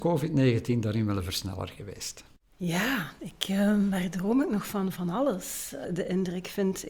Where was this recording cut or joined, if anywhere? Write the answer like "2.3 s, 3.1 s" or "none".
2.4 s, 5.8 s